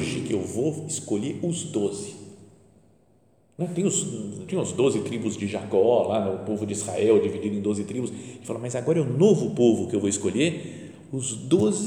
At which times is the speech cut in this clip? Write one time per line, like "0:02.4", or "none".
0:04.5